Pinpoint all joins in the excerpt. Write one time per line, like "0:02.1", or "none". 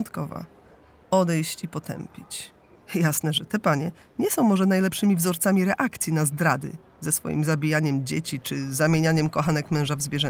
0:01.0
0:02.8